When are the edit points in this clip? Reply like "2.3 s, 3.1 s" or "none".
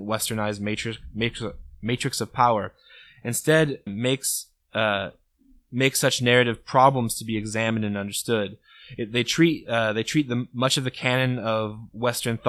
3.9 s